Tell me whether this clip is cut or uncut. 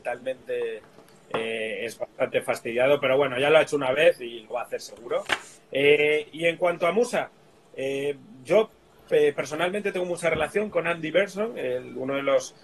uncut